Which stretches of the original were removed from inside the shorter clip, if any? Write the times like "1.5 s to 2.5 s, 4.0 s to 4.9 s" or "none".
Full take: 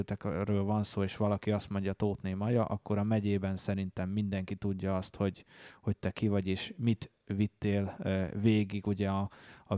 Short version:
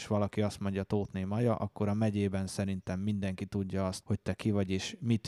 5.1 s to 5.8 s